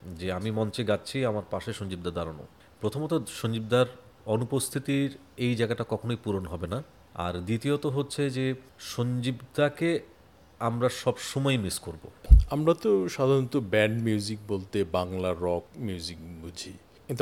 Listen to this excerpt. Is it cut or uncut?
uncut